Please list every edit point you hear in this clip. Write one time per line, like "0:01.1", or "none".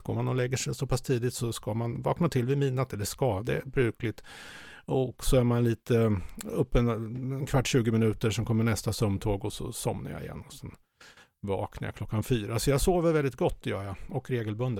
none